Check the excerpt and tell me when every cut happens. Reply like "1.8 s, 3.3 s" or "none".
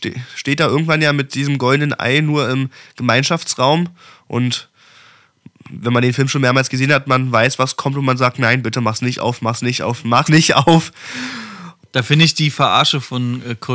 10.3 s